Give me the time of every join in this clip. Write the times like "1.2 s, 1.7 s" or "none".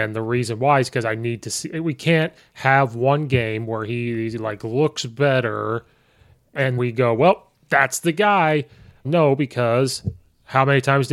6.8 s, 9.0 s